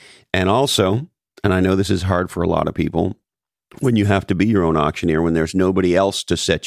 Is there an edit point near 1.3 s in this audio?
no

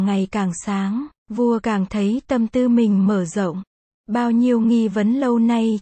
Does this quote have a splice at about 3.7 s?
no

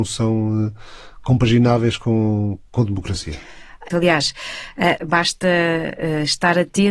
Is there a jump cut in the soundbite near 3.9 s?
yes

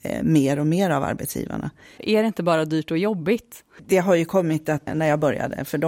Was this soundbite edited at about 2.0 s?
yes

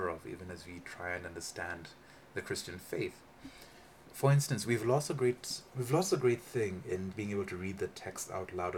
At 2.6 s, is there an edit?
no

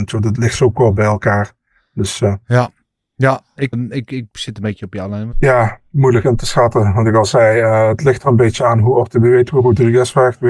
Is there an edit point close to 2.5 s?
no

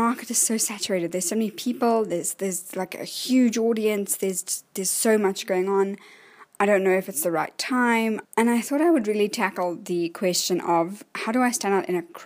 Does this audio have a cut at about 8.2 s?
yes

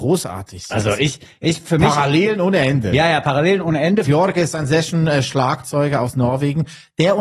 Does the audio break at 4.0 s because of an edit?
yes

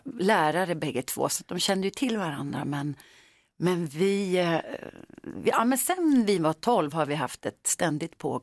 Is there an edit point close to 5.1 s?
no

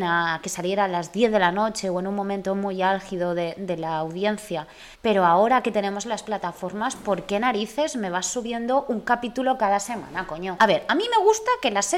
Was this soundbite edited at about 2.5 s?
no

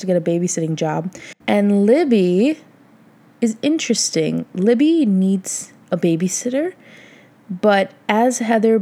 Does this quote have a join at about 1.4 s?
yes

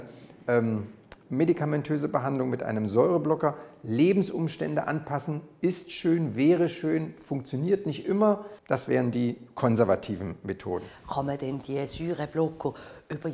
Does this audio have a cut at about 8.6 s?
yes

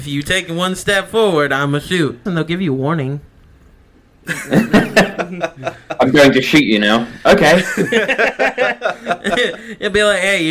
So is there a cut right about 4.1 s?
no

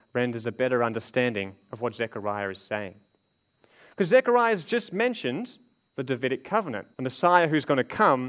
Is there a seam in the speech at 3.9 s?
no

